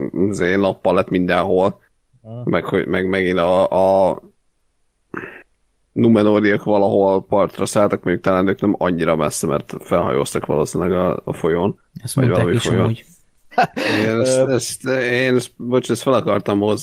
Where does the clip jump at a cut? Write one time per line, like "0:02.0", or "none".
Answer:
0:13.5